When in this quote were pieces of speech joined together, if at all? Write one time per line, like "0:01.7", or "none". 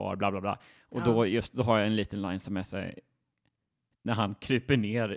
none